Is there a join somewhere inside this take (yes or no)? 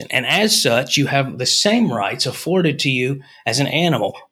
no